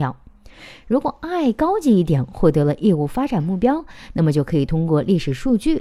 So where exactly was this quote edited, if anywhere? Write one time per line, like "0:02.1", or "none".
none